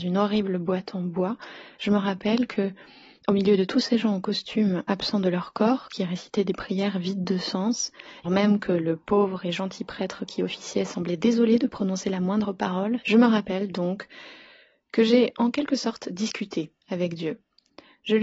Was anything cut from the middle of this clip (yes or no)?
yes